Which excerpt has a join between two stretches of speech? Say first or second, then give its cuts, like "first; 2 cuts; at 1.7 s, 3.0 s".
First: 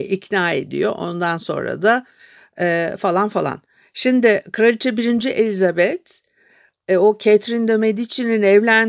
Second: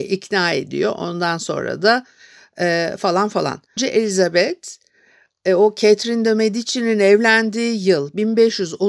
second; 1 cut; at 3.8 s